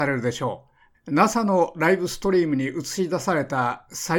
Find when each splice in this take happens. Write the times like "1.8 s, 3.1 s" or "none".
0.9 s